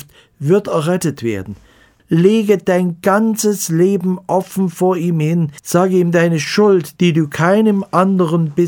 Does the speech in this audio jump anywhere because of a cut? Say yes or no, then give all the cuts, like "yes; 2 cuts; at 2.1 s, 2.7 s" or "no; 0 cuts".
yes; 3 cuts; at 2.0 s, 5.6 s, 7.0 s